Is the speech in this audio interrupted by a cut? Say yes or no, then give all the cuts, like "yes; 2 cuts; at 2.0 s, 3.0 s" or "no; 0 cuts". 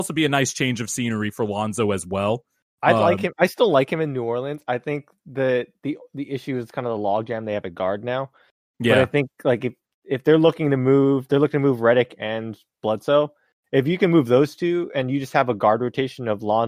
no; 0 cuts